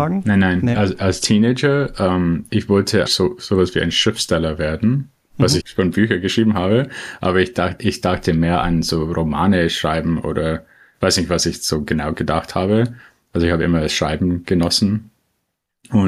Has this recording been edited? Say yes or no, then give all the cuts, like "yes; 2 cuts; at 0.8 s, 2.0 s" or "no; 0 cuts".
yes; 2 cuts; at 3.1 s, 5.6 s